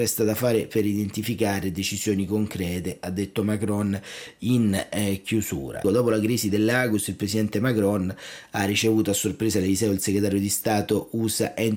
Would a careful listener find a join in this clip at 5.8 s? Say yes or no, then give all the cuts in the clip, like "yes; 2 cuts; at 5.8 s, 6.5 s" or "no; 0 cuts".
yes; 1 cut; at 5.8 s